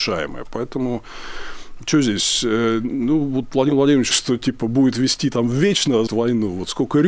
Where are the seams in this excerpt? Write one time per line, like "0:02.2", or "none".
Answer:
0:04.1
0:06.1